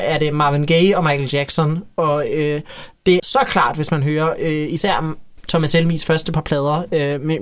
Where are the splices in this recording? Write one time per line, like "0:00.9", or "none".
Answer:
0:03.2